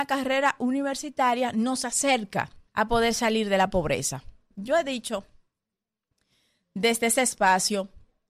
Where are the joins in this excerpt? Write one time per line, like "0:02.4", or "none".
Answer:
0:02.7
0:04.5